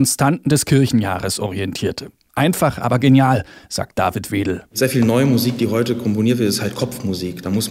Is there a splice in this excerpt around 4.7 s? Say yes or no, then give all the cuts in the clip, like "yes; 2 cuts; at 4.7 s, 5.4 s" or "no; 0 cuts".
no; 1 cut; at 2.3 s